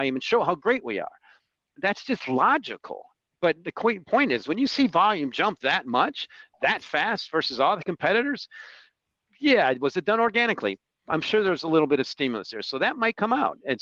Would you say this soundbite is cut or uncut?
uncut